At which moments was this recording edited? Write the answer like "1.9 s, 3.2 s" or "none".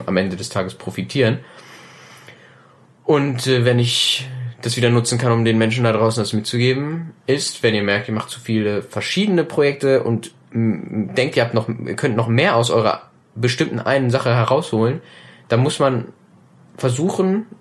none